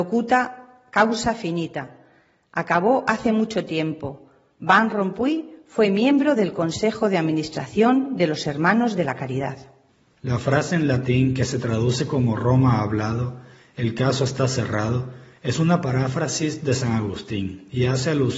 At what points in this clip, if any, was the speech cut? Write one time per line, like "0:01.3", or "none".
none